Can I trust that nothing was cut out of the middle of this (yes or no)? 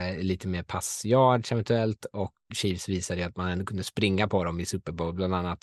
no